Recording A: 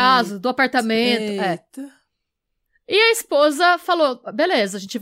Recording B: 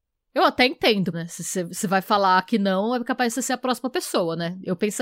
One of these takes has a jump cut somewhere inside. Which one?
B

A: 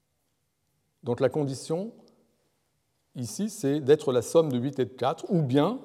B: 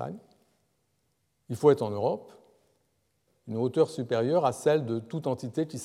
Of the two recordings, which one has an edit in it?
B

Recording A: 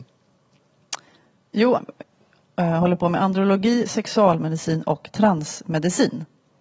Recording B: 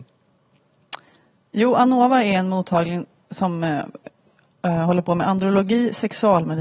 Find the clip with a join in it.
A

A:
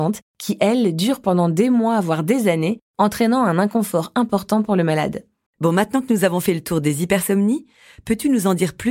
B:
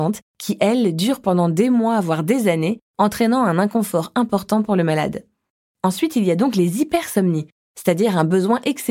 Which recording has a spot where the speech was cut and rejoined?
A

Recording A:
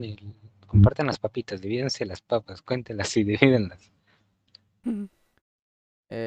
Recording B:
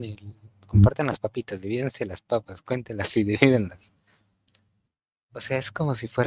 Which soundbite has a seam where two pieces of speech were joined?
A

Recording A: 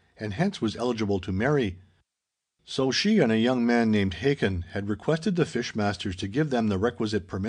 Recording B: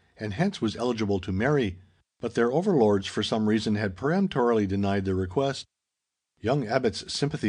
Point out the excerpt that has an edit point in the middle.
B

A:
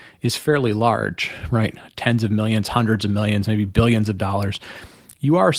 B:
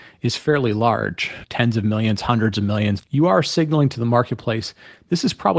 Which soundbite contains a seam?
B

